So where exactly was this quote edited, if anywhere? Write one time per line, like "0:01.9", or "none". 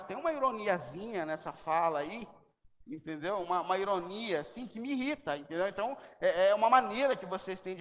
none